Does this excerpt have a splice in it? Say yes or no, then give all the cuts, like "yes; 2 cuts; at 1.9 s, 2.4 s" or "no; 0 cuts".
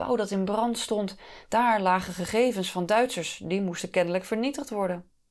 no; 0 cuts